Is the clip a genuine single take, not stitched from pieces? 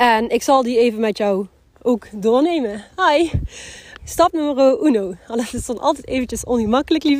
no; 1 cut; at 4.0 s

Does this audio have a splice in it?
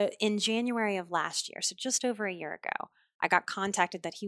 no; 0 cuts

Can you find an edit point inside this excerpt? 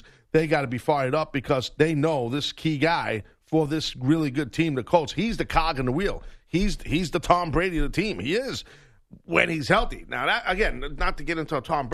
no; 0 cuts

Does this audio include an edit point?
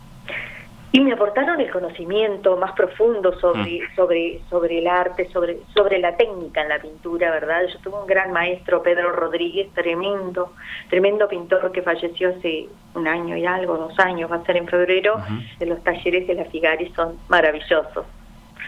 yes; 1 cut; at 15.6 s

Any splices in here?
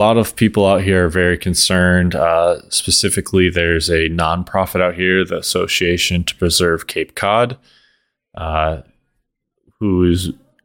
no; 0 cuts

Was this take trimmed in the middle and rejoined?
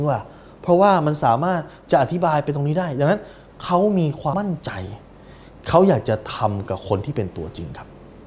yes; 1 cut; at 4.3 s

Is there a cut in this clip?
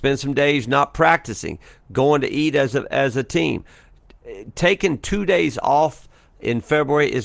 no; 0 cuts

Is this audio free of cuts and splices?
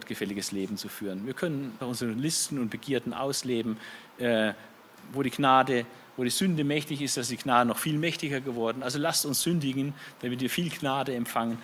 no; 1 cut; at 1.8 s

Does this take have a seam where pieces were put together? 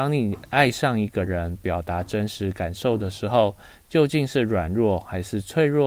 no; 0 cuts

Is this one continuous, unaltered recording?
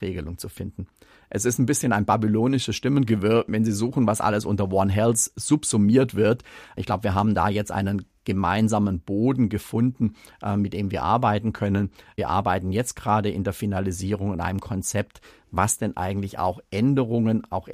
yes; 0 cuts

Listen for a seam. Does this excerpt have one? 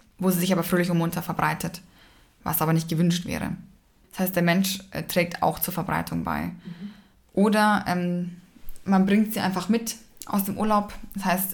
no; 0 cuts

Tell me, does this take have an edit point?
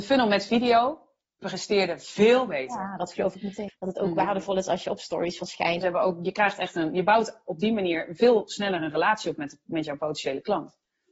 yes; 2 cuts; at 3.7 s, 5.8 s

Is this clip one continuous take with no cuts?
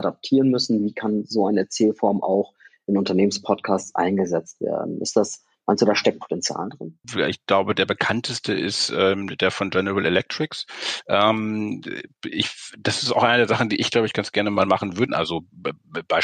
no; 2 cuts; at 7.0 s, 15.1 s

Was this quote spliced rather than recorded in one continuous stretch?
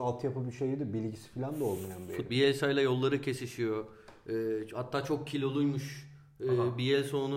yes; 1 cut; at 2.3 s

